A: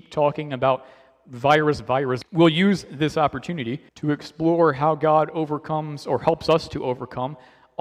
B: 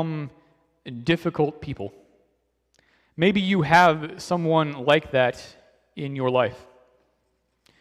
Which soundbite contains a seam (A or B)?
A